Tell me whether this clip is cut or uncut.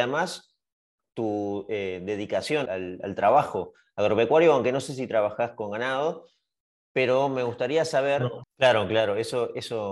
cut